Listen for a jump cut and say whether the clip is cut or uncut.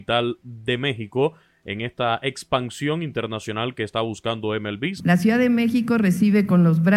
cut